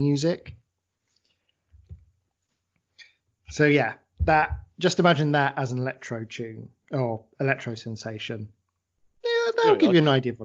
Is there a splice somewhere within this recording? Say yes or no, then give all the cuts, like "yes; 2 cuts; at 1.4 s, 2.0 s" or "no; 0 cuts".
no; 0 cuts